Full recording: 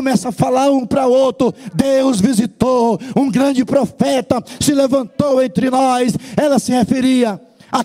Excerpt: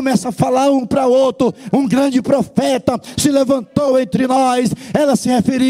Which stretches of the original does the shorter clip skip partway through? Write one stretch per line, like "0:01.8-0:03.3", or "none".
0:01.7-0:03.1